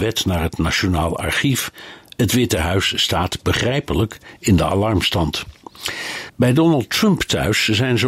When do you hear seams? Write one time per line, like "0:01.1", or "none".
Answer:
none